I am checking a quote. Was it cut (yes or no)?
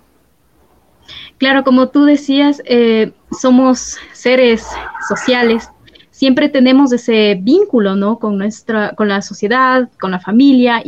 no